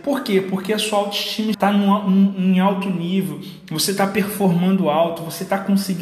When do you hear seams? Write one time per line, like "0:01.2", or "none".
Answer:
0:01.5